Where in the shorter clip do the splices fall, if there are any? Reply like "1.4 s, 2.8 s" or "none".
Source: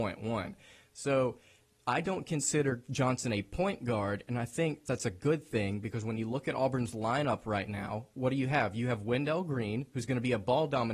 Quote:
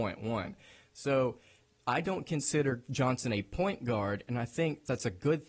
none